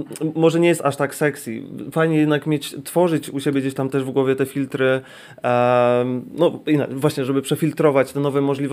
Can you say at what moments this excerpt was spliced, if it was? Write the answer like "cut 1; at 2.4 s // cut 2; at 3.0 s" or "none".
none